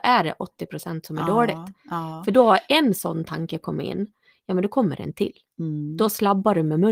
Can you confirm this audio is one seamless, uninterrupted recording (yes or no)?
yes